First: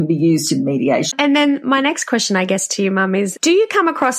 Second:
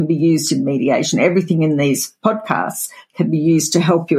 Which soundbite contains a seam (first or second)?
first